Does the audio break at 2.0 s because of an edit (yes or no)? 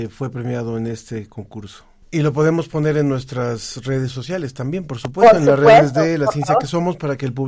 yes